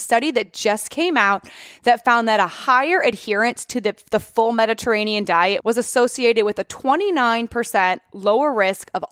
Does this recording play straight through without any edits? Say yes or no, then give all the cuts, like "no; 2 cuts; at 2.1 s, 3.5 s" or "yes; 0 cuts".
no; 1 cut; at 5.6 s